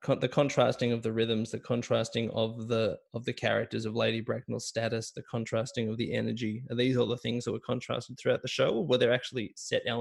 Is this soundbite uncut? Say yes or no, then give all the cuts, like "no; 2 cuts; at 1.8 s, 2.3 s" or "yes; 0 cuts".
yes; 0 cuts